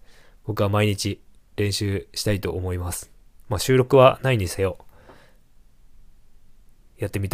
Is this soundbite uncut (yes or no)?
yes